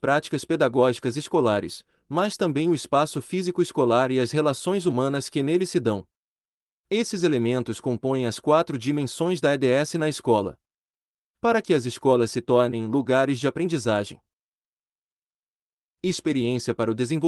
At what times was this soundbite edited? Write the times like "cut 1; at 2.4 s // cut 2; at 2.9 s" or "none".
none